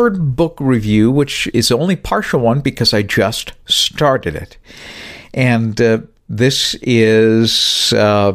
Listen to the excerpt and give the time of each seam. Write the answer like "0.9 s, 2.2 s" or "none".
1.5 s